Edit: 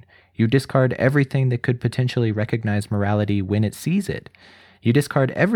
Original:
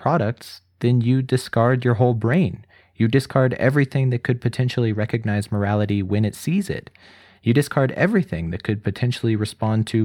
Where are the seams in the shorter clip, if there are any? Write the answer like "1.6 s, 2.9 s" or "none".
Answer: none